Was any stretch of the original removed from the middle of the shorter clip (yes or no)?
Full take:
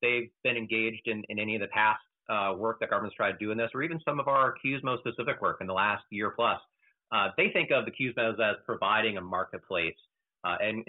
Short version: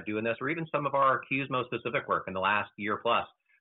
no